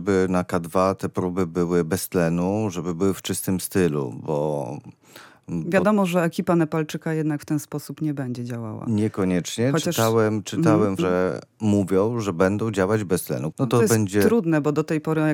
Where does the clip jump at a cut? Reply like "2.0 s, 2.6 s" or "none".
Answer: 11.0 s, 13.5 s